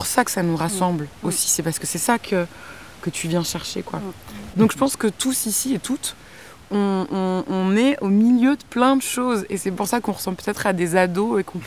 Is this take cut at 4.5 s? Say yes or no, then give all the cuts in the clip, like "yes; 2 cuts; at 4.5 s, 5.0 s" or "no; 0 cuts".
yes; 1 cut; at 4.5 s